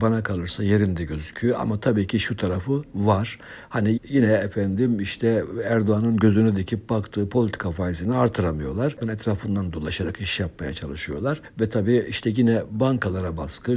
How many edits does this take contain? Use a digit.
2